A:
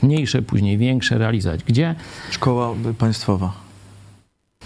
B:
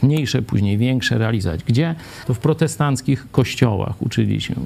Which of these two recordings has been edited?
B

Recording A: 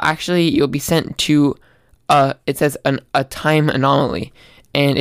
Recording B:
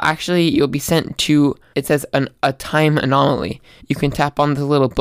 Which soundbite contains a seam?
B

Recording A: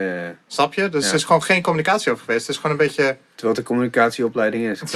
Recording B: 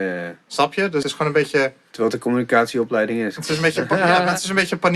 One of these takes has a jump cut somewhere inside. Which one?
B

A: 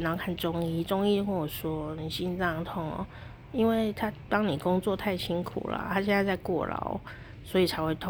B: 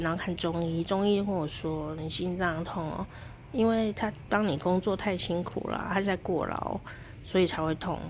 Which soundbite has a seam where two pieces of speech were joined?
B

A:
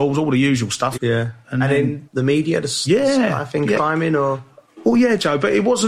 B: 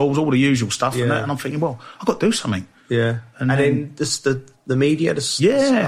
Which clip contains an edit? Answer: A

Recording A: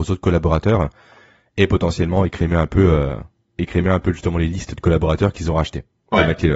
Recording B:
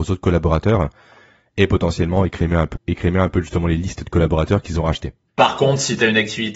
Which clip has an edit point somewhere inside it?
B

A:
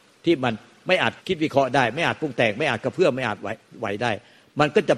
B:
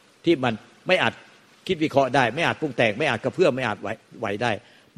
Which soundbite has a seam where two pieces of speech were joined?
A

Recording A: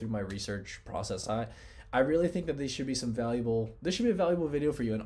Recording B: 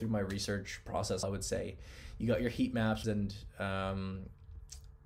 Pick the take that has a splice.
B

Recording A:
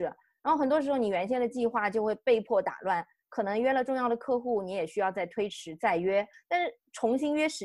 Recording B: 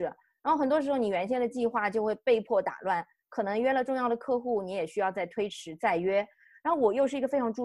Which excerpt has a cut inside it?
A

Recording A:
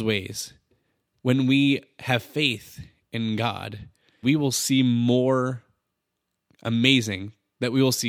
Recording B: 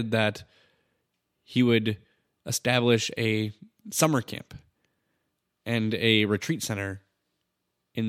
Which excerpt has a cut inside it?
A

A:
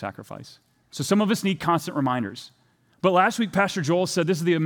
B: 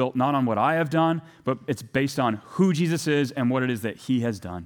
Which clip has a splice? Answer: A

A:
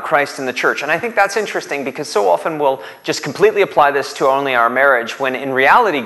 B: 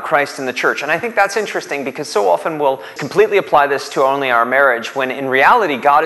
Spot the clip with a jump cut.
B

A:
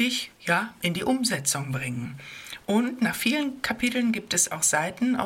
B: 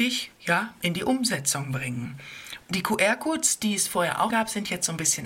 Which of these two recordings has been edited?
B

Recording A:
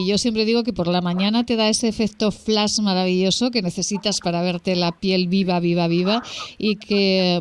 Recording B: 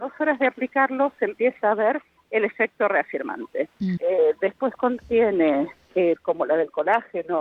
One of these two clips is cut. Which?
B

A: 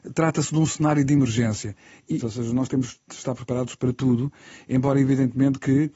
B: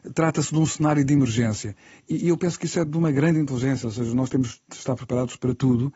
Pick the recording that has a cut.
A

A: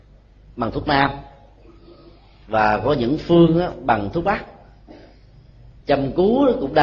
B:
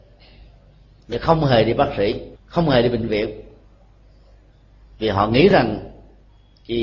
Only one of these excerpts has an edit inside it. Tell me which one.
B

